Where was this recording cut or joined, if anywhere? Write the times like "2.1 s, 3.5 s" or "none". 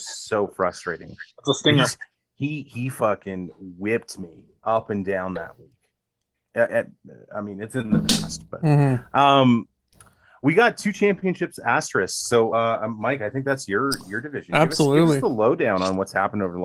none